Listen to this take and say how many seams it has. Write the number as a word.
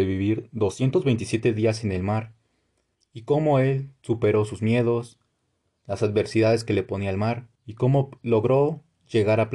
two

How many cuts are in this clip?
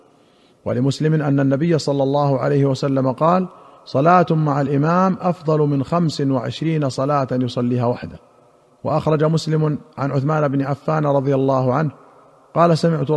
zero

